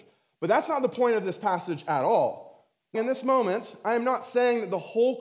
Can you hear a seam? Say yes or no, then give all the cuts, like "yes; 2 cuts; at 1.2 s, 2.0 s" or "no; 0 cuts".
yes; 1 cut; at 2.9 s